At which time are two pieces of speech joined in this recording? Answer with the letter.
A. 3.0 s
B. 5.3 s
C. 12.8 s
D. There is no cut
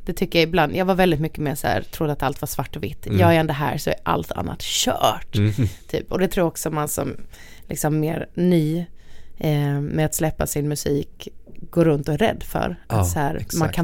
D